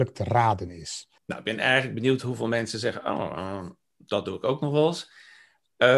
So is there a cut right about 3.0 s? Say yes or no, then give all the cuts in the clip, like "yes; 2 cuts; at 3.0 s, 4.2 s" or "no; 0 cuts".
no; 1 cut; at 1.2 s